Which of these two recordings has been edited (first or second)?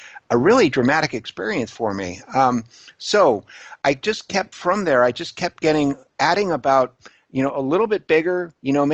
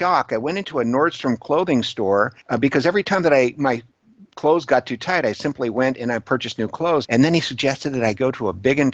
second